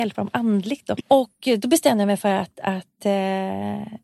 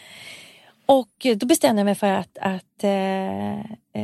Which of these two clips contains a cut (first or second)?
first